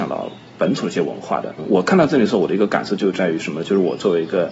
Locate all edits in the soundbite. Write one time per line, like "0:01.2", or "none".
none